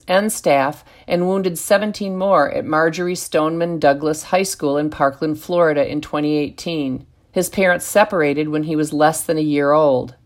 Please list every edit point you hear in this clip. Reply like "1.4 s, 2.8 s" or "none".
7.3 s